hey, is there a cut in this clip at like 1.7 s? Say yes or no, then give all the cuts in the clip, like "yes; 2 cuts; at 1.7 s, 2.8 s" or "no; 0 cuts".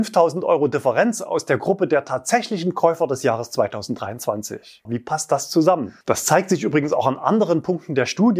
no; 2 cuts; at 4.9 s, 6.0 s